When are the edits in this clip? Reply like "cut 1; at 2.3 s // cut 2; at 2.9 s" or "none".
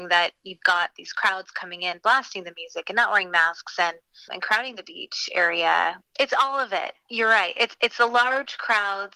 cut 1; at 4.3 s // cut 2; at 6.0 s